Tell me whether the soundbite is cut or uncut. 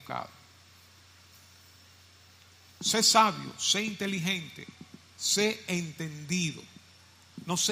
uncut